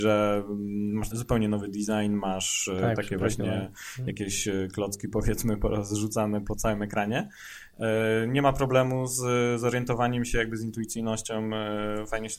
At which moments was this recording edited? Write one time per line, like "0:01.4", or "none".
0:01.1